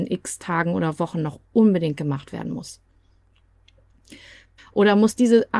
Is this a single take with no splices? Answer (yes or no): no